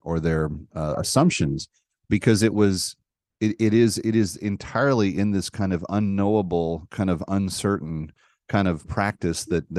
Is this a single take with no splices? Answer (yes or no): yes